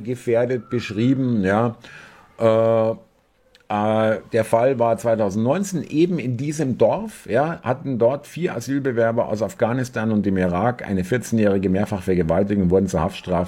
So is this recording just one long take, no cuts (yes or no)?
yes